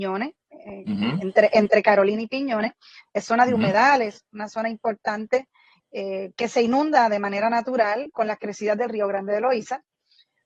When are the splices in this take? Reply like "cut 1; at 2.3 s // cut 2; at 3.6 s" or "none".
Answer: none